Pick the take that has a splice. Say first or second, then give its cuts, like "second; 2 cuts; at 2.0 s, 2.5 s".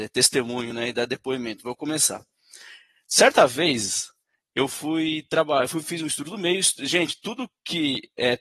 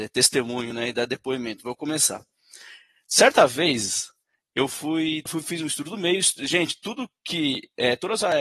second; 1 cut; at 5.3 s